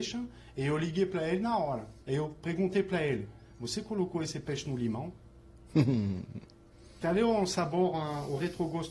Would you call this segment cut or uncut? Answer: cut